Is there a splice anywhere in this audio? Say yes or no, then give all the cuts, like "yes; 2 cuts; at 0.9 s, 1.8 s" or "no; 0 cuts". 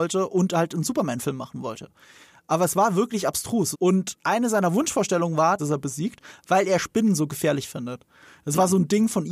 yes; 2 cuts; at 3.7 s, 5.6 s